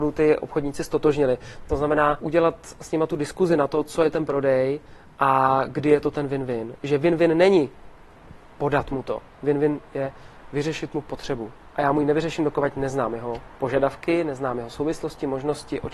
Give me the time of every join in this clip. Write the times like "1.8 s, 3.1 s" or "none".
2.2 s